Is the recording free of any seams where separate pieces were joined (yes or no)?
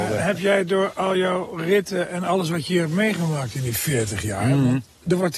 yes